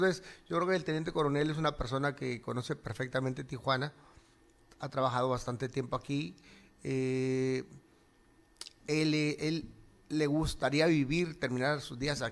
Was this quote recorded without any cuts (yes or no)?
yes